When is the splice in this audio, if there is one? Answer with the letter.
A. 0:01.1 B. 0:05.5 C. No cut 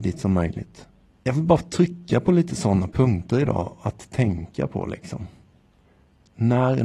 A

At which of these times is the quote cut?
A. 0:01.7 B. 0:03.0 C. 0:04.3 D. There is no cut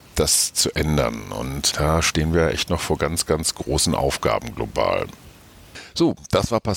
A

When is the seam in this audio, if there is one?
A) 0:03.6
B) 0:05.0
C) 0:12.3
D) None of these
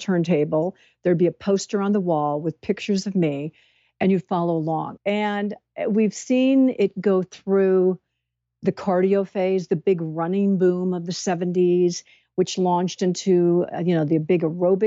B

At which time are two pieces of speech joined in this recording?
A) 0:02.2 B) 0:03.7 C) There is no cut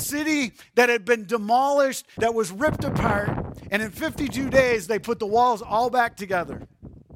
A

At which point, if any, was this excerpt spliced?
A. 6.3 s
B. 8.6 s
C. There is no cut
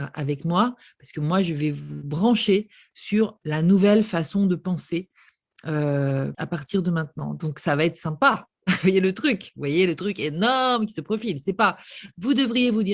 A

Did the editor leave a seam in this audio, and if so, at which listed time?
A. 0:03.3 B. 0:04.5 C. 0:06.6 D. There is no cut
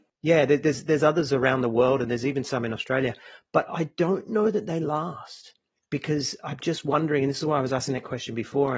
D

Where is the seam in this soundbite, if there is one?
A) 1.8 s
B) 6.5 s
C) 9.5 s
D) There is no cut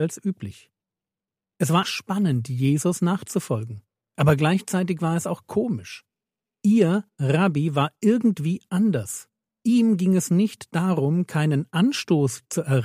A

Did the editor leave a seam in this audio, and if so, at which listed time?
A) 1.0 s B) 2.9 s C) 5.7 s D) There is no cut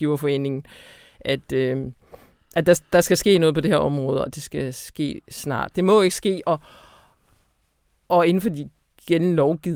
C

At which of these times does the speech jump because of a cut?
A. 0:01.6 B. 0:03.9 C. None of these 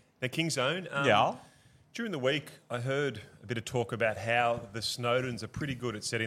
C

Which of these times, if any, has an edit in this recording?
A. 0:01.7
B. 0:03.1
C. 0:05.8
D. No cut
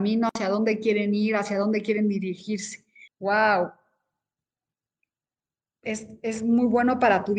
B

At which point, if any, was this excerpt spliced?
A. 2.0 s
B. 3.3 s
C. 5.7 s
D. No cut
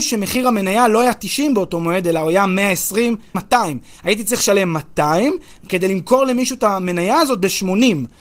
B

